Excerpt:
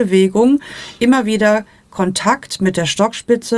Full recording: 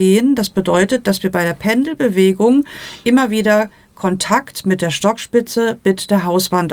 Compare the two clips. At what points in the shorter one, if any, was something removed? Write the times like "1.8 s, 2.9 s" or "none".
none